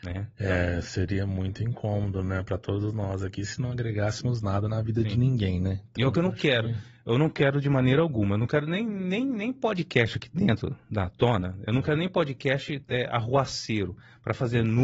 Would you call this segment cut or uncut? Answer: uncut